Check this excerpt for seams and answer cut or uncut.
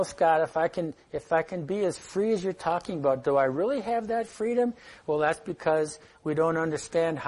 uncut